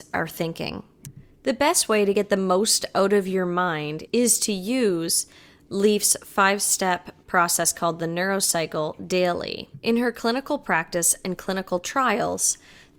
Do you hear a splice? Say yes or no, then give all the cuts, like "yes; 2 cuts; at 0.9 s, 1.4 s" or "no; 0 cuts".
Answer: yes; 1 cut; at 4.1 s